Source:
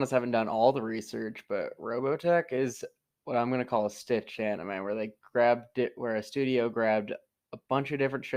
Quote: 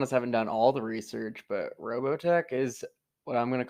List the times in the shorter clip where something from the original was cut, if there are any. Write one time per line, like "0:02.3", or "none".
none